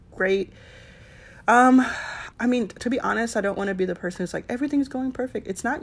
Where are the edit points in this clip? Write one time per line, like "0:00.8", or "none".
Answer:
0:02.3